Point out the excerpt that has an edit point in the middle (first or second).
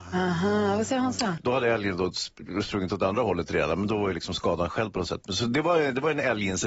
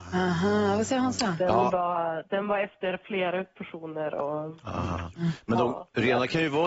first